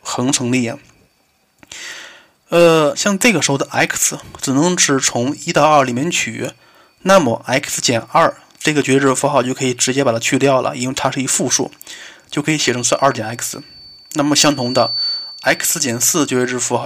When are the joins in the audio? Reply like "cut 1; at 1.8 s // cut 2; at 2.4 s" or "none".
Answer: cut 1; at 2.9 s